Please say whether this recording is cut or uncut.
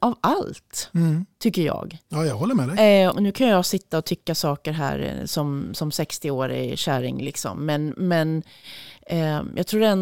cut